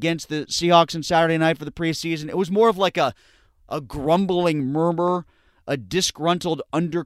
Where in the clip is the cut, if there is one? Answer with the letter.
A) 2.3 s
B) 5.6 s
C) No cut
C